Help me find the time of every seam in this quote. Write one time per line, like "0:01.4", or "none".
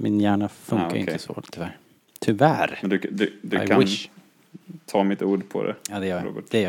none